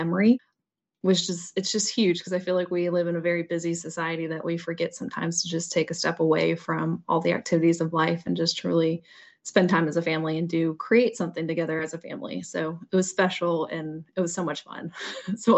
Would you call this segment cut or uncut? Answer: uncut